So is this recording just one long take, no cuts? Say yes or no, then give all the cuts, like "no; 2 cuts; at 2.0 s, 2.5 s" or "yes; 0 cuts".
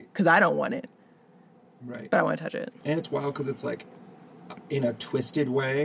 no; 1 cut; at 2.8 s